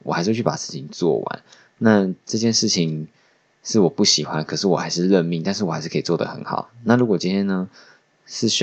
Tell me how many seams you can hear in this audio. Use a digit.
0